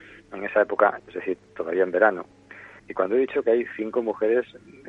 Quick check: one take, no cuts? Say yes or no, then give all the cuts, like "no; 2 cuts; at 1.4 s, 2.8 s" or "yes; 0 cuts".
no; 2 cuts; at 1.0 s, 2.8 s